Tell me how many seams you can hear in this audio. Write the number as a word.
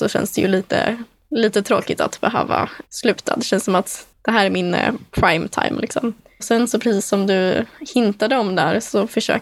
zero